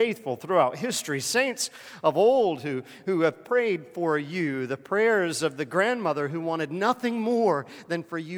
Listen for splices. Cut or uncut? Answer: uncut